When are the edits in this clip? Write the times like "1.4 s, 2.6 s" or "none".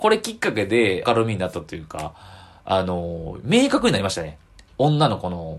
1.0 s